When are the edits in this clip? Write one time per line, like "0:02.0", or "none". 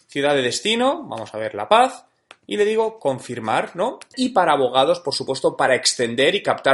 0:04.1